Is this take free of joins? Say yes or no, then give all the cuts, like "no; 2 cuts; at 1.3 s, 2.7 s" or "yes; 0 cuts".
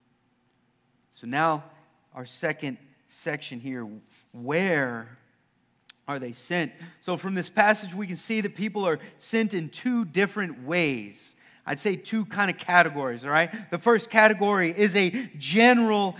yes; 0 cuts